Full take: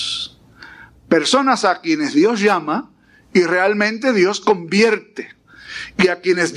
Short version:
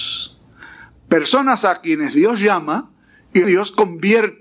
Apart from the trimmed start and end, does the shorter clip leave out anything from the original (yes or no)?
yes